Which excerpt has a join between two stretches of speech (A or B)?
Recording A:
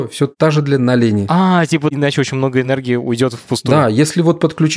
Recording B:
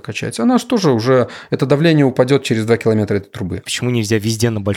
B